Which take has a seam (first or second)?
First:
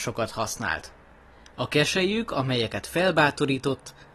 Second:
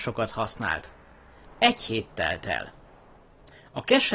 second